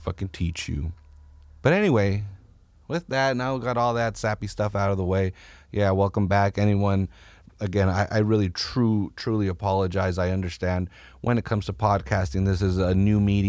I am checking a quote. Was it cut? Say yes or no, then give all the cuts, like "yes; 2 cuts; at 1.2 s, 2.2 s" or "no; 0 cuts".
no; 0 cuts